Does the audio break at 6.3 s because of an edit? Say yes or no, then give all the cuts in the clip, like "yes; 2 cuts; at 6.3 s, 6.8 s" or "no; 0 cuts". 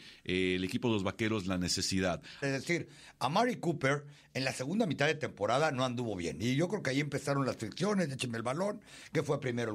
no; 1 cut; at 2.4 s